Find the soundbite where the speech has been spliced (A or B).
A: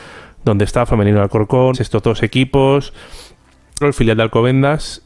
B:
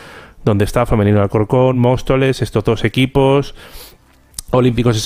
A